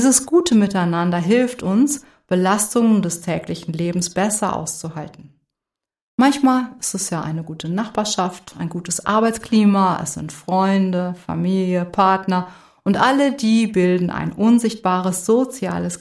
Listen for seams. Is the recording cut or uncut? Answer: uncut